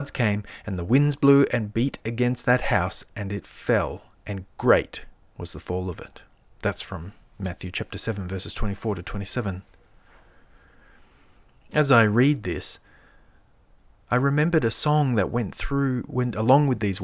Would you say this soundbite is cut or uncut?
uncut